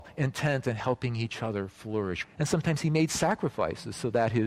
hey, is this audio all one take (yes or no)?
no